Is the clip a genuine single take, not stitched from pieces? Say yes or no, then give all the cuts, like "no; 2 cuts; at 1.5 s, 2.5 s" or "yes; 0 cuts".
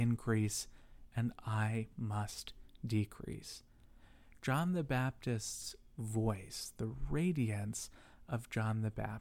yes; 0 cuts